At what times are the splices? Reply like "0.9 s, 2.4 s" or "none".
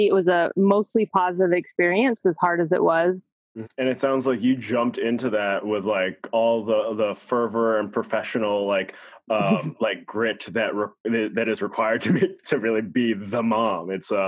3.6 s

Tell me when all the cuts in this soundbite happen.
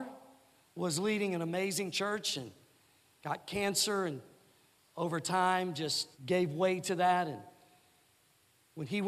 3.2 s, 6.1 s

